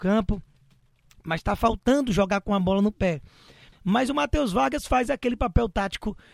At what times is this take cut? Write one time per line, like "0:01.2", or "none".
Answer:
0:03.7